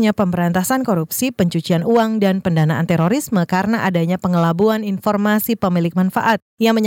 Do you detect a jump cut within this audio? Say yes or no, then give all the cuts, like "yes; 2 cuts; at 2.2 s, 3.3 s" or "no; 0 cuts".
no; 0 cuts